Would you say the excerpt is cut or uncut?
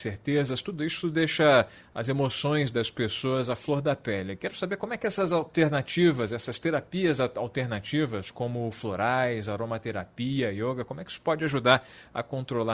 uncut